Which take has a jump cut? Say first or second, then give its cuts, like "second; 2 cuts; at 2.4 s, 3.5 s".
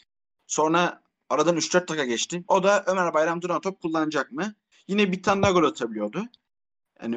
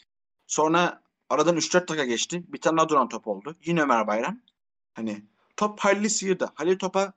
first; 2 cuts; at 2.4 s, 4.7 s